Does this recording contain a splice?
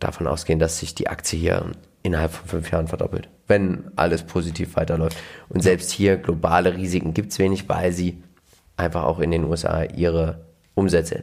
no; 0 cuts

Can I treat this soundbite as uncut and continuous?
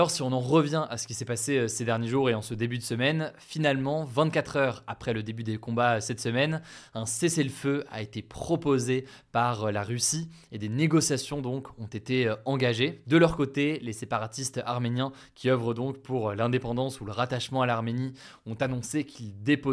yes; 0 cuts

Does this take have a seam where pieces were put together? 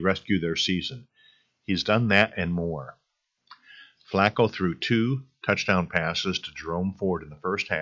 no; 0 cuts

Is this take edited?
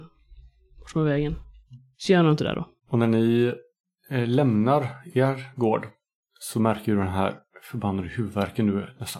no; 0 cuts

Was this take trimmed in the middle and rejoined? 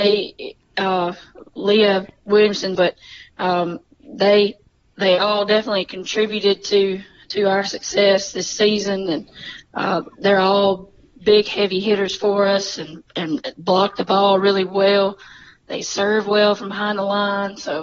yes; 1 cut; at 2.8 s

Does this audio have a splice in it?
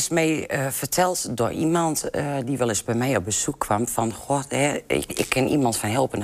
no; 0 cuts

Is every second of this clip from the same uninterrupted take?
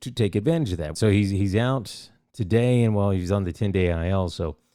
no; 1 cut; at 0.9 s

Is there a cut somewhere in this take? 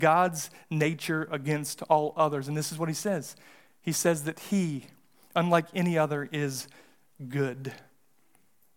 no; 0 cuts

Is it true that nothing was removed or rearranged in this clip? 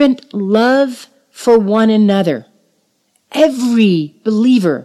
yes; 0 cuts

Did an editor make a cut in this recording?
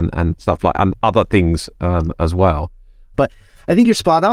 yes; 1 cut; at 3.1 s

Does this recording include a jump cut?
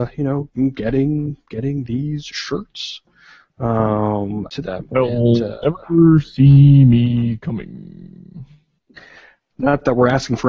yes; 2 cuts; at 4.5 s, 9.5 s

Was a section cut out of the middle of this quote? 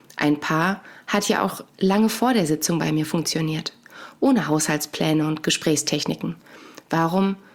no; 0 cuts

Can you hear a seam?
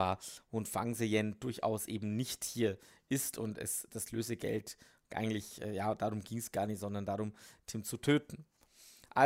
no; 0 cuts

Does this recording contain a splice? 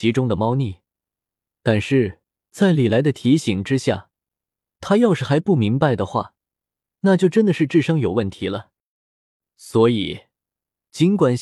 no; 0 cuts

